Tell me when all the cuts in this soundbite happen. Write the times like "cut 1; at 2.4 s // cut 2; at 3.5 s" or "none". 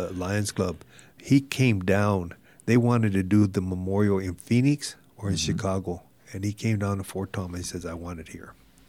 none